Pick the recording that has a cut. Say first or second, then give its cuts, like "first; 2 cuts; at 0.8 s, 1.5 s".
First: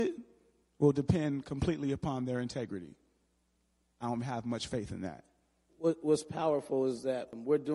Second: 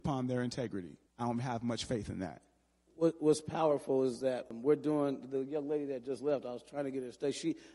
second; 1 cut; at 1.1 s